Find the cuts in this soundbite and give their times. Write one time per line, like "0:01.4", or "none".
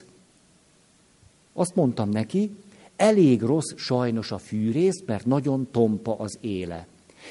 none